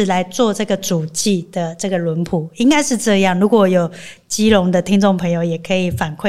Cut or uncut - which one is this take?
uncut